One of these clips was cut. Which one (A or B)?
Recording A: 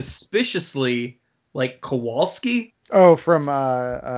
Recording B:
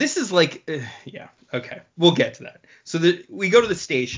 A